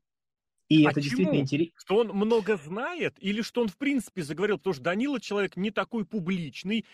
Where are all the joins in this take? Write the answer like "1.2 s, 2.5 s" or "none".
none